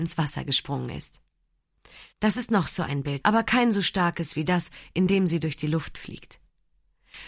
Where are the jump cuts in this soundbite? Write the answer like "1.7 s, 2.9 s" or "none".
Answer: 2.1 s, 3.2 s